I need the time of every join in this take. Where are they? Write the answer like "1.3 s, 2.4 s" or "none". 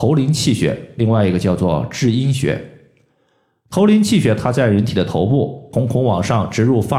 5.7 s